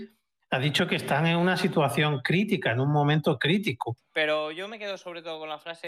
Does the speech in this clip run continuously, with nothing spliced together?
no; 1 cut; at 4.0 s

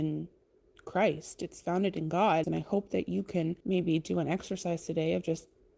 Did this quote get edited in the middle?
yes; 2 cuts; at 2.4 s, 3.6 s

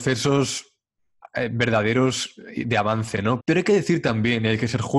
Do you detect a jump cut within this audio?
yes; 1 cut; at 3.4 s

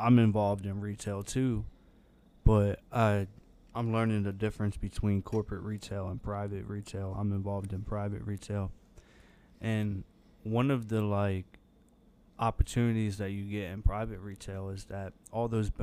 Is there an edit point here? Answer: no; 0 cuts

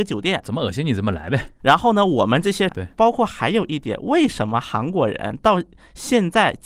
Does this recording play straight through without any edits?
no; 1 cut; at 2.7 s

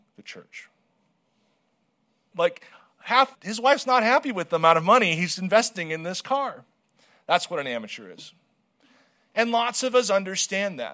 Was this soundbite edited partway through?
yes; 2 cuts; at 2.3 s, 3.3 s

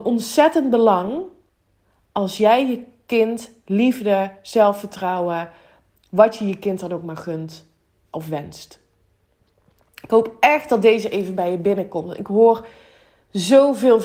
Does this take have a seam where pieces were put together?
no; 0 cuts

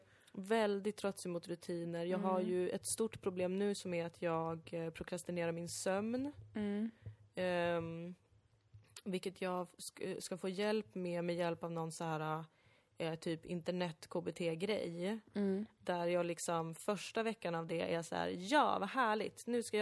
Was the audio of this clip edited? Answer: no; 0 cuts

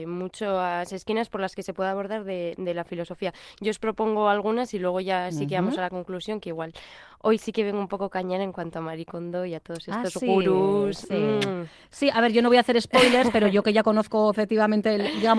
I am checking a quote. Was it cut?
no; 0 cuts

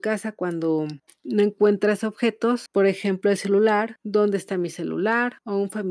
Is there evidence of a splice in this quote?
no; 0 cuts

